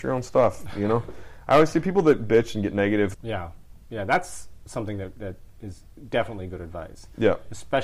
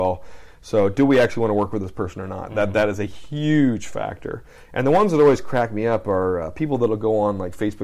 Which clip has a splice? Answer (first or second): first